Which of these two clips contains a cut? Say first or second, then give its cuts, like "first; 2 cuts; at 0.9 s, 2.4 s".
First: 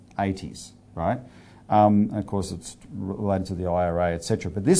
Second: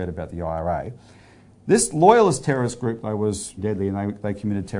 second; 1 cut; at 3.6 s